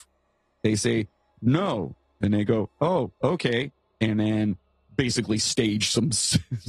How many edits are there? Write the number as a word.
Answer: one